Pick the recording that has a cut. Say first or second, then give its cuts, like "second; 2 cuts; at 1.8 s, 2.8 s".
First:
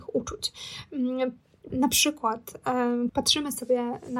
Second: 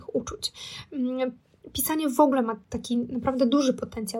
first; 2 cuts; at 1.7 s, 3.1 s